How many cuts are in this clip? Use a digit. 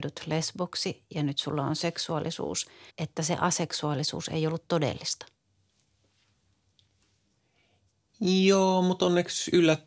1